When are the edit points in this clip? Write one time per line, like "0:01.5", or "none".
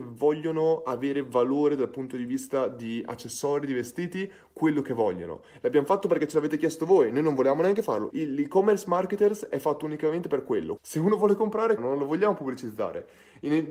0:08.1
0:10.8
0:11.8